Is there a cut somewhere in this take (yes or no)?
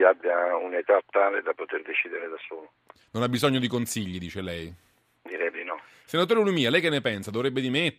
yes